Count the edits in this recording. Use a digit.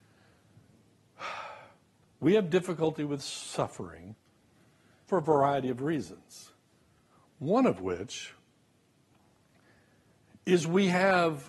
0